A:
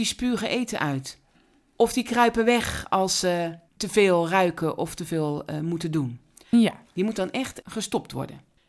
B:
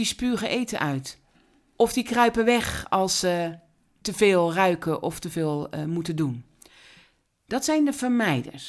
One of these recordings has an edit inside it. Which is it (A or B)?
A